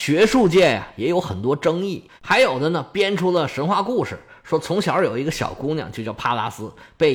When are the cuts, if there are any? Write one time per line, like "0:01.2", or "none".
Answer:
0:02.2